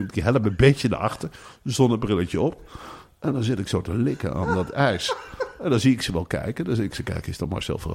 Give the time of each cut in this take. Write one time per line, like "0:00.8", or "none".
none